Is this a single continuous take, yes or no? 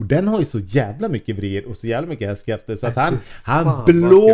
yes